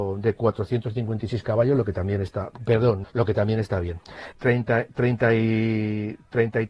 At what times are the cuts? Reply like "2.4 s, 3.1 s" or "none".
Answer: 3.0 s, 4.3 s